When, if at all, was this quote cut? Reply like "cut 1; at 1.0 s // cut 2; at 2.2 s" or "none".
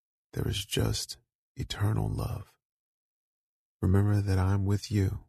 cut 1; at 3.6 s